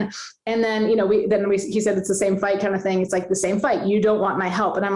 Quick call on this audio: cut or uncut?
uncut